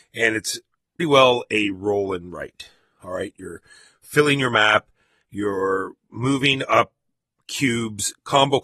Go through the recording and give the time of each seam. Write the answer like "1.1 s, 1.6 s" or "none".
1.0 s